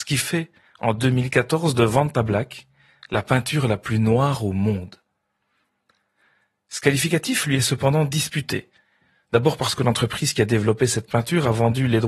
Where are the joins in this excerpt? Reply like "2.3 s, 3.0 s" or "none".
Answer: none